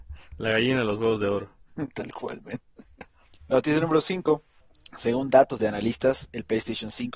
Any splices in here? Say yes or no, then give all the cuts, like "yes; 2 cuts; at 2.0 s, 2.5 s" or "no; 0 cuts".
no; 0 cuts